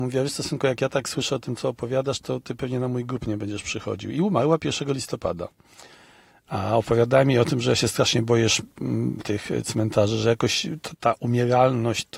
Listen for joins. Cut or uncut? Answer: uncut